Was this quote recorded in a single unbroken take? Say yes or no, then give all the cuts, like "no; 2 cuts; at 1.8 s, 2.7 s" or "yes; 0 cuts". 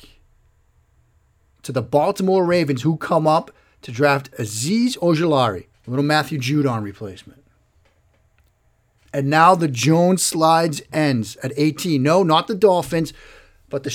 no; 2 cuts; at 5.7 s, 9.0 s